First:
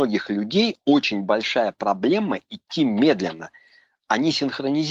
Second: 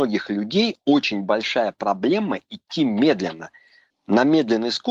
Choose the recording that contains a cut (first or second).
second